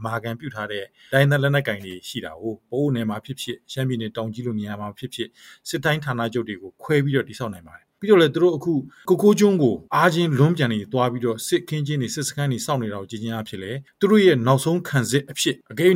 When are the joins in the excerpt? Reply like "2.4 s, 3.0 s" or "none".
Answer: 9.9 s